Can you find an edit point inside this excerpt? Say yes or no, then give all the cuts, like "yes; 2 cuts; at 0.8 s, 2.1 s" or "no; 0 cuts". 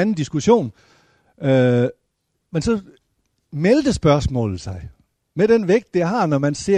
no; 0 cuts